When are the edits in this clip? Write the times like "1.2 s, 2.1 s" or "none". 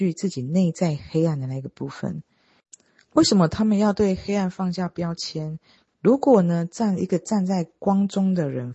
5.9 s